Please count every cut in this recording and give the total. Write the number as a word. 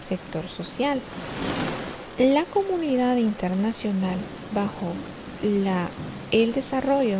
zero